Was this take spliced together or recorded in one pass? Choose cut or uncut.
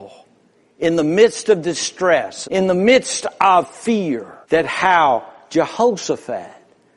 cut